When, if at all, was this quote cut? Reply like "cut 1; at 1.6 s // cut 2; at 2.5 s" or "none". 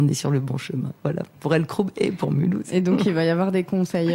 none